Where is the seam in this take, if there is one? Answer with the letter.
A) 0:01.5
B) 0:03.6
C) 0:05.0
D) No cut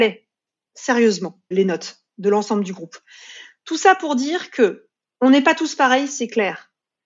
A